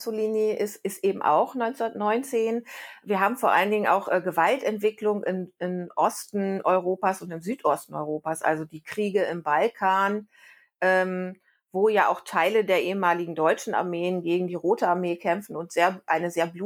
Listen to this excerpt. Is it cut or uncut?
uncut